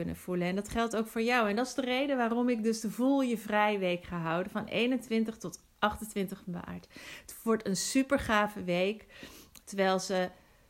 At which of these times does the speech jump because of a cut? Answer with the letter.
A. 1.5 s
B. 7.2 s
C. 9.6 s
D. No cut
C